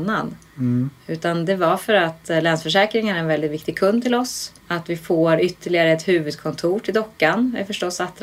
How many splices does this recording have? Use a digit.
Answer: 1